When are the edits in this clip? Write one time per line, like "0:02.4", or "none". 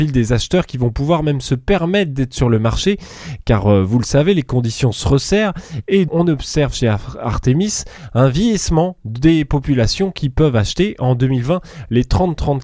0:06.1